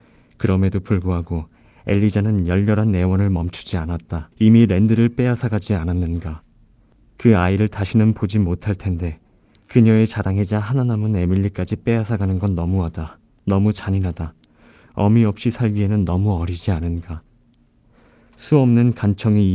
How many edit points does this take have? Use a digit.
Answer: 1